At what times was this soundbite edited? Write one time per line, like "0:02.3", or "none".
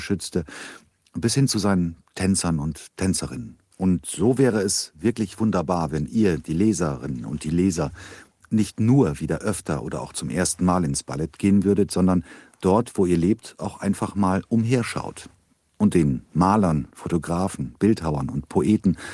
0:03.7
0:16.9